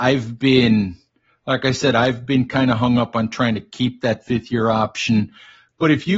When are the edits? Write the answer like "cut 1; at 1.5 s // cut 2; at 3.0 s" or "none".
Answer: none